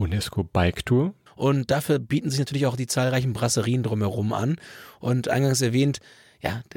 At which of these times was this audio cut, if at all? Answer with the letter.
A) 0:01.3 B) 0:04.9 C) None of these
A